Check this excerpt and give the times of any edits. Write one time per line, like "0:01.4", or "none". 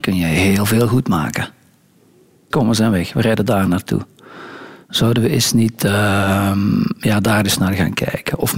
0:02.5

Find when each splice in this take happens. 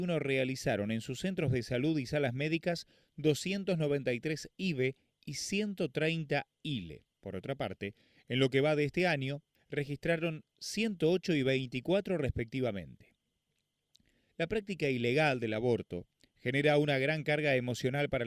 0:07.1
0:09.5
0:14.3

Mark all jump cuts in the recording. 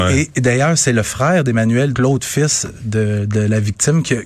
0:01.9

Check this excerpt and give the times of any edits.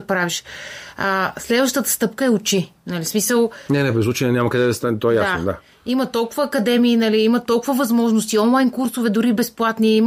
none

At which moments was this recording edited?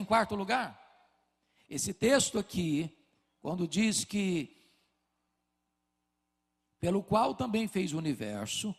none

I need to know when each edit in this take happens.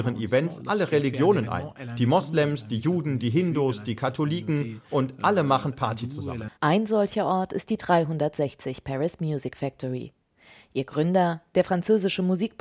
0:06.5

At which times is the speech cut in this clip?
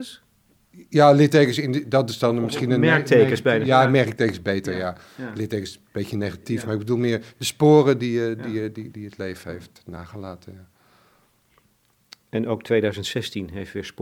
none

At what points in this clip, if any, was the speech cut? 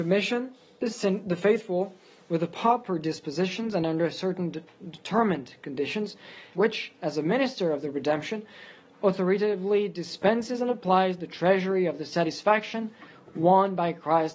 0:06.5

